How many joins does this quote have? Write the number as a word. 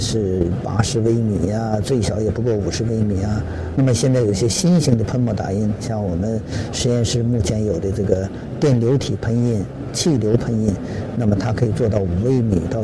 one